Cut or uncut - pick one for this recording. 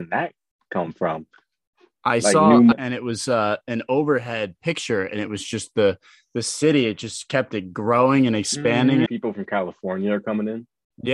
cut